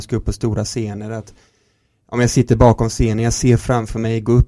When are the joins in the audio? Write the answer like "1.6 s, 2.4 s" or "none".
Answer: none